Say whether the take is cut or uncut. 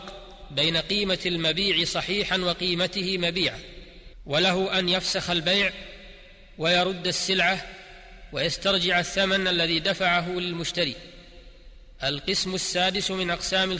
uncut